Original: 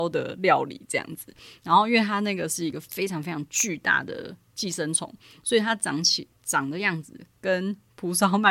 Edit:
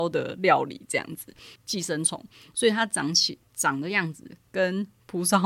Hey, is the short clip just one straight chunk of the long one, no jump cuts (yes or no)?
no